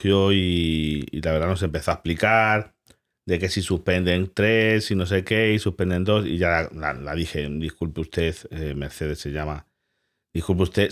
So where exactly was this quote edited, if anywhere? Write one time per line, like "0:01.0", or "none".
0:07.0